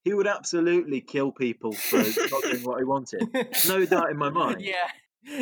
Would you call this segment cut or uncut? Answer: uncut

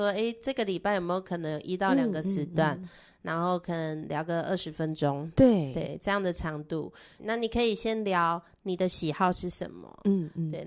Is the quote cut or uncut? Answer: cut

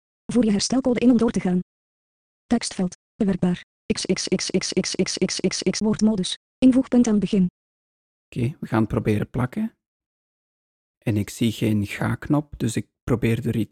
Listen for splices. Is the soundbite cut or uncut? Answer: uncut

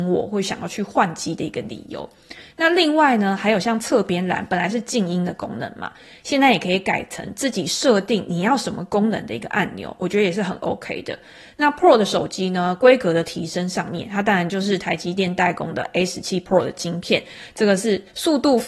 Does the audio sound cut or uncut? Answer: uncut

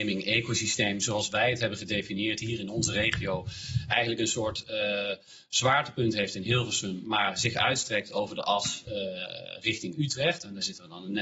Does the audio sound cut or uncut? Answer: uncut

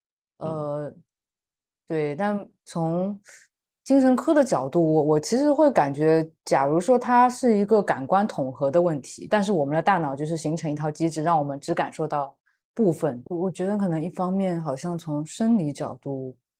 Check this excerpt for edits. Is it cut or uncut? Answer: cut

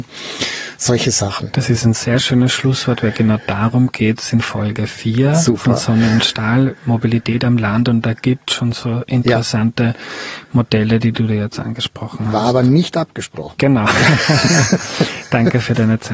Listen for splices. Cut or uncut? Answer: uncut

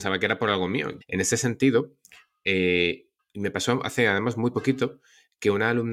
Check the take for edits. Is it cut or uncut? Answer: cut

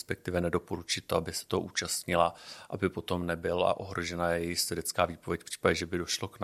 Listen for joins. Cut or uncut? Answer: uncut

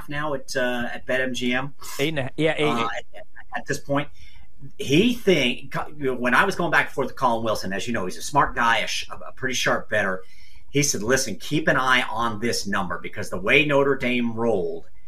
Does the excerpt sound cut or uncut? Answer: uncut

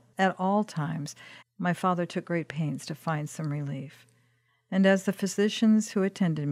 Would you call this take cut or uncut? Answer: cut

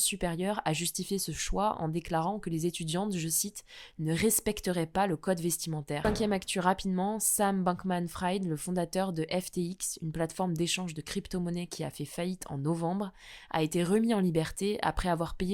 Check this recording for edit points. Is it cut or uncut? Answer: cut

